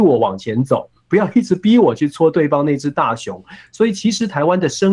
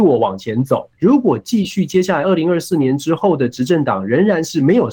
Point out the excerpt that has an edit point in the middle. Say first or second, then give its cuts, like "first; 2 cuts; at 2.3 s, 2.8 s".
second; 1 cut; at 0.9 s